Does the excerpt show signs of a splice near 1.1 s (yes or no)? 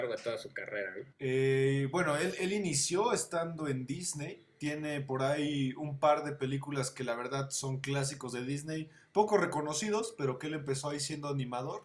yes